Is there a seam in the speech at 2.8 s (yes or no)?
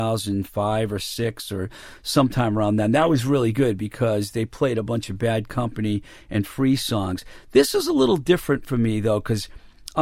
no